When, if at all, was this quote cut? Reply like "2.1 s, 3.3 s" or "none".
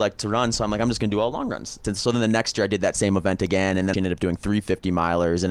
1.8 s, 3.9 s